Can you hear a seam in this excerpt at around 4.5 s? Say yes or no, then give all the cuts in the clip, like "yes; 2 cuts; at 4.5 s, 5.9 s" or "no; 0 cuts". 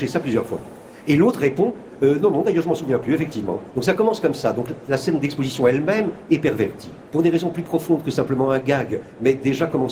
no; 1 cut; at 7.1 s